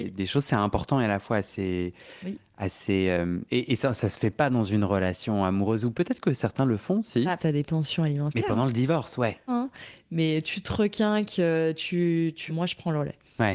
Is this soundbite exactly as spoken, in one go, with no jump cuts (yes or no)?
no